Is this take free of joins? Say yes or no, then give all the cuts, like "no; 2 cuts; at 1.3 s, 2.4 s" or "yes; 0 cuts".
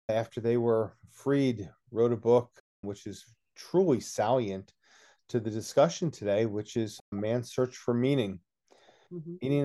yes; 0 cuts